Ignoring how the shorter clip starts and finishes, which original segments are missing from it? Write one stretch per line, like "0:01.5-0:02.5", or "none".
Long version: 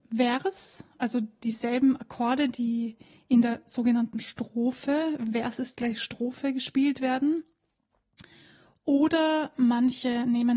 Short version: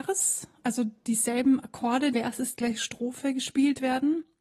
0:02.5-0:05.3

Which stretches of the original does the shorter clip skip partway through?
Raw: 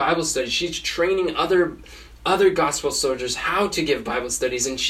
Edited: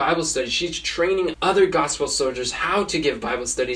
0:01.3-0:02.2

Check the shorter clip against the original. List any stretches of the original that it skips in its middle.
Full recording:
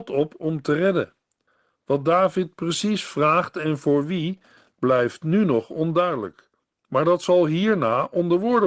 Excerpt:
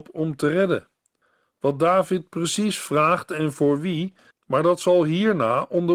0:04.6-0:06.7

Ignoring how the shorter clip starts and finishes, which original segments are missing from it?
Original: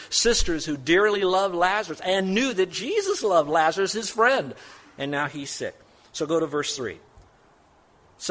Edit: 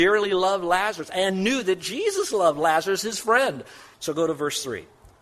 0:04.8-0:06.1

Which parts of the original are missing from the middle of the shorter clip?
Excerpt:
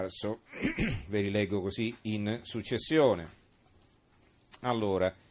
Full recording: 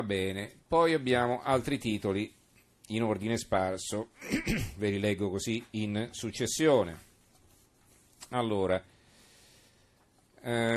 none

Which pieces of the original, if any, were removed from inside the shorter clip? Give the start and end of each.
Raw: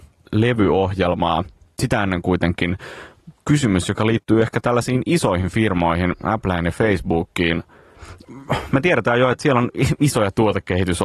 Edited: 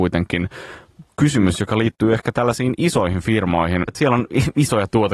0:06.2-0:09.3

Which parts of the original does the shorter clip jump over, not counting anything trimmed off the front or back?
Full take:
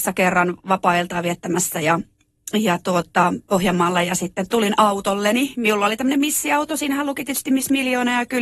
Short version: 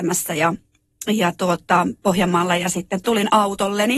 none

